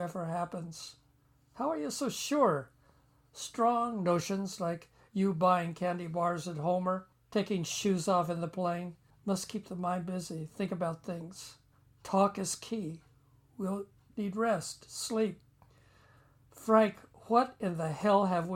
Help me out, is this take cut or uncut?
uncut